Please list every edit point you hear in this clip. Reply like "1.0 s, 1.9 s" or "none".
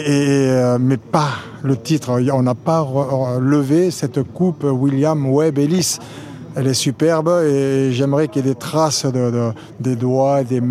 none